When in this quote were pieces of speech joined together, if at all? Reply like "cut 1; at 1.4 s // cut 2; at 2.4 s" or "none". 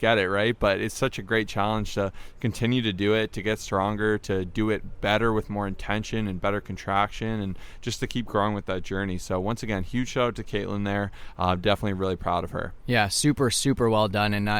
none